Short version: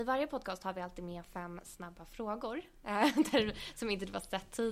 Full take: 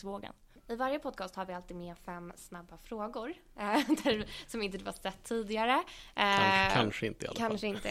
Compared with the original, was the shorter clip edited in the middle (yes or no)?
no